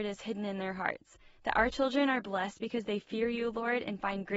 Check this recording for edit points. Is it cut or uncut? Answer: uncut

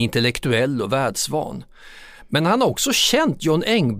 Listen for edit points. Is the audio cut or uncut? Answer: uncut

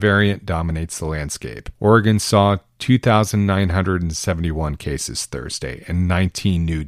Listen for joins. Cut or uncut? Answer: uncut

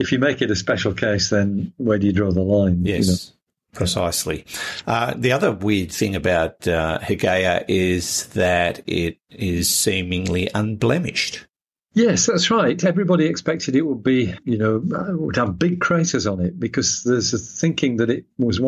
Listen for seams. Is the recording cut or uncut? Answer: uncut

